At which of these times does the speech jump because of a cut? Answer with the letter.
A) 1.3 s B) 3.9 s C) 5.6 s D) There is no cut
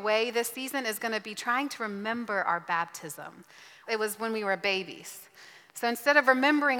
B